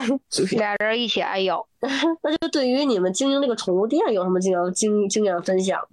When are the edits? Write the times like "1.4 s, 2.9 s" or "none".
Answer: none